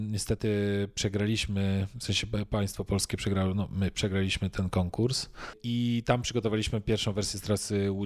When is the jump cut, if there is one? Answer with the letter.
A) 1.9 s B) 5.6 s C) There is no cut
C